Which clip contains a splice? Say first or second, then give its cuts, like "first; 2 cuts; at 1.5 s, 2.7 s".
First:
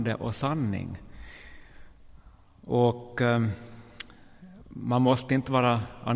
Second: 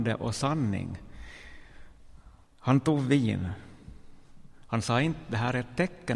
second; 2 cuts; at 2.4 s, 4.7 s